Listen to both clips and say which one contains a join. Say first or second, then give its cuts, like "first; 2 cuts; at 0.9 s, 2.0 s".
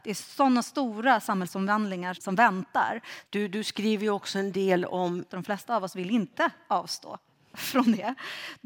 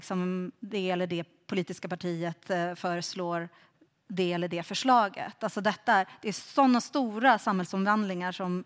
first; 3 cuts; at 2.1 s, 3.2 s, 5.3 s